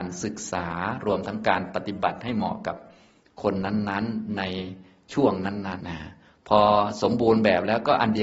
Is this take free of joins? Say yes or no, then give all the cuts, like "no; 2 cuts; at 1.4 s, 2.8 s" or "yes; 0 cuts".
no; 1 cut; at 5.8 s